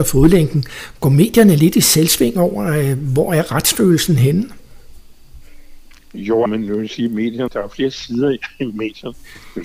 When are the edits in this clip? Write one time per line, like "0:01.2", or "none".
0:06.5
0:07.5